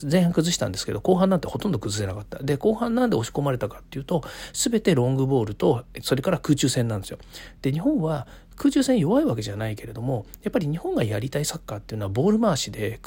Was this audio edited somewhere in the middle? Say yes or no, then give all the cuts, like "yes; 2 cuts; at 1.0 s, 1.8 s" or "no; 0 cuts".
no; 0 cuts